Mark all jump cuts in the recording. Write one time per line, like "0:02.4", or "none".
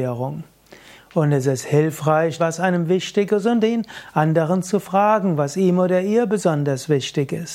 0:01.0
0:02.4